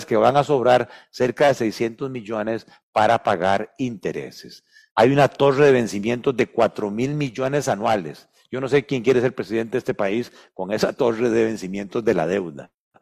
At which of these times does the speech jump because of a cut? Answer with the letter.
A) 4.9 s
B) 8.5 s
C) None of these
A